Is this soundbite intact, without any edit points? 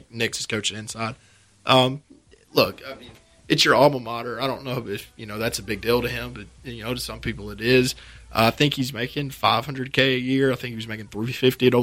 yes; 0 cuts

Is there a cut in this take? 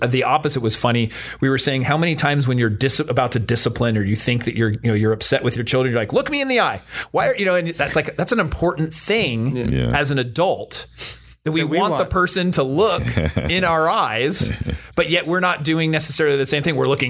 no; 0 cuts

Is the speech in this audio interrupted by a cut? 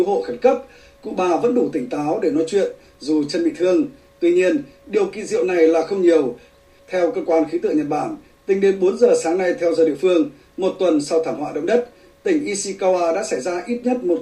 no; 0 cuts

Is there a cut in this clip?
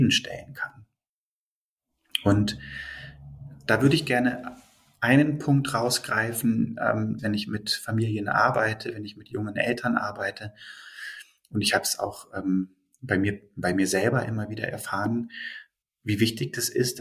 yes; 2 cuts; at 7.2 s, 15.8 s

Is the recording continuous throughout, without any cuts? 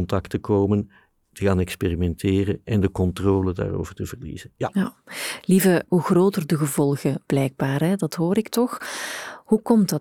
no; 1 cut; at 5.9 s

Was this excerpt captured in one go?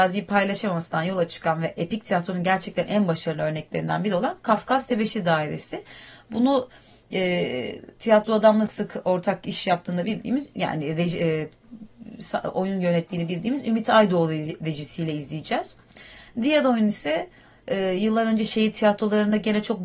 no; 1 cut; at 8.7 s

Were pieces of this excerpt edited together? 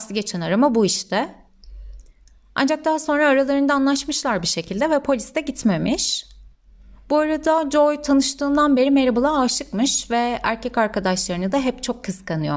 no; 0 cuts

